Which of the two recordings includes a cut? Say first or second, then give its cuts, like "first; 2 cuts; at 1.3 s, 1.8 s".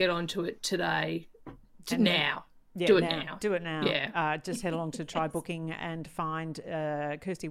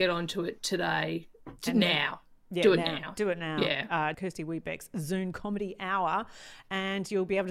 second; 2 cuts; at 1.6 s, 4.1 s